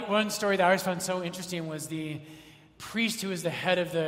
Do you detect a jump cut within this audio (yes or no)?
no